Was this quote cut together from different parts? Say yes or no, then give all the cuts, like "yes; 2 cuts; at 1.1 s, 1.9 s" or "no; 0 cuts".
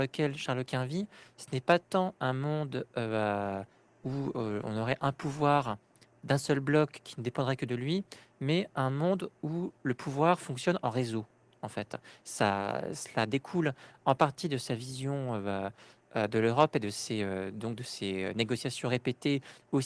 no; 0 cuts